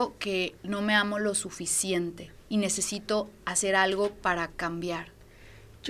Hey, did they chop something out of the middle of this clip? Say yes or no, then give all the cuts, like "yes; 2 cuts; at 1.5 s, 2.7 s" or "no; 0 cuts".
no; 0 cuts